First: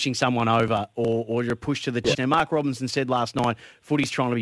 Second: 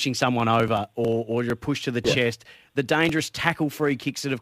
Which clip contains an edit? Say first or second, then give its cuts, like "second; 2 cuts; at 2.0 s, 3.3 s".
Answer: first; 1 cut; at 2.1 s